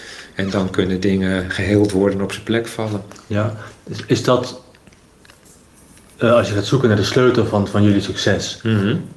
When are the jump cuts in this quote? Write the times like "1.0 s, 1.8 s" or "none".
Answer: none